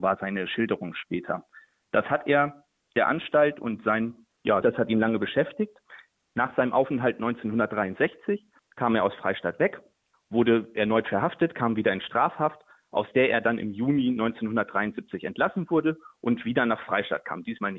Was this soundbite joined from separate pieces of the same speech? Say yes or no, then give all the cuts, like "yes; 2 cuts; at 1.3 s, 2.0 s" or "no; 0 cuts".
yes; 1 cut; at 4.6 s